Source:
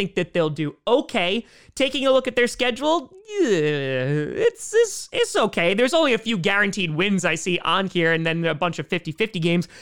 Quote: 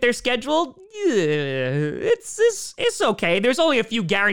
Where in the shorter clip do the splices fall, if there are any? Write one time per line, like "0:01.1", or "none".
none